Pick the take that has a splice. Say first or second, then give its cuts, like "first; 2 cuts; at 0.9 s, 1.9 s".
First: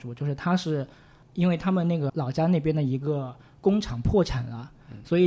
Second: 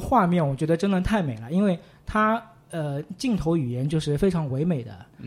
first; 1 cut; at 2.1 s